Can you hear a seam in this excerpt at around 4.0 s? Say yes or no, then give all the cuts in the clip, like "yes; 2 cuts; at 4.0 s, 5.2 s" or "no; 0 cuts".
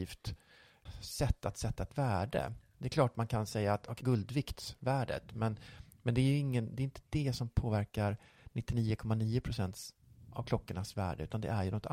yes; 1 cut; at 4.0 s